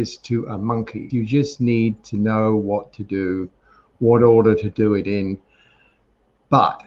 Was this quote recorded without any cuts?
no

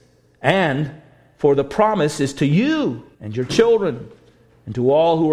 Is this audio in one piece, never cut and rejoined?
no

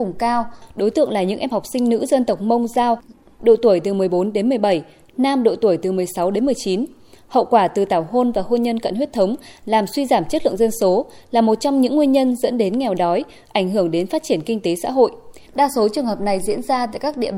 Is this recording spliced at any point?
yes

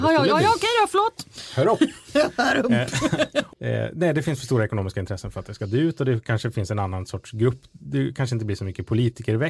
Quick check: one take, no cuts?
no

